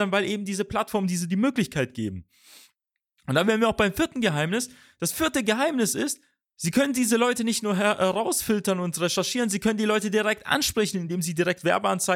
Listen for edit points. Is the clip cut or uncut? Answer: uncut